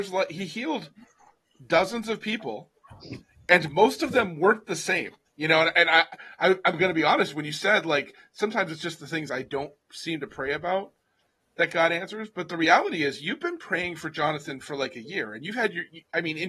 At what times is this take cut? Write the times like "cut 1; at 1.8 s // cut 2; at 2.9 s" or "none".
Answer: cut 1; at 5.3 s